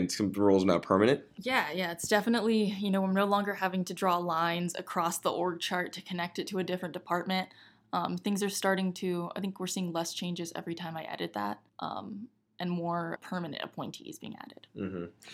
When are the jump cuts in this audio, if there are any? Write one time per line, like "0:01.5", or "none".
0:11.7
0:13.2